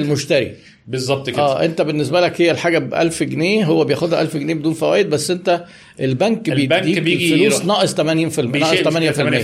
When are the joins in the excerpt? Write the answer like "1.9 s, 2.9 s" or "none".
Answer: none